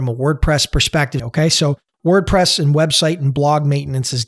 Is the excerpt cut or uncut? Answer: cut